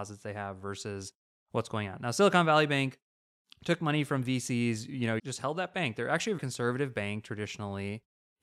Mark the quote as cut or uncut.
cut